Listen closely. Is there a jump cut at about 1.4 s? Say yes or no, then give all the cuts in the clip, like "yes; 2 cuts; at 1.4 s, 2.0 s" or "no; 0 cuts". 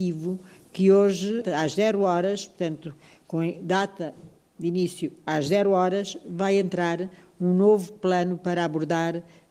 yes; 1 cut; at 1.4 s